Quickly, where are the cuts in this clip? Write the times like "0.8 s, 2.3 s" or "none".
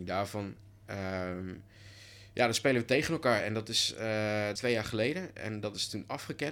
4.6 s